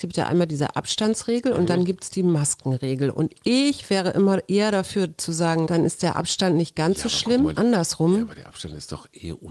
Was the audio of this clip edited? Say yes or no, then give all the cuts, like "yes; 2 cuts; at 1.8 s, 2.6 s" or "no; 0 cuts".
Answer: yes; 2 cuts; at 5.7 s, 7.5 s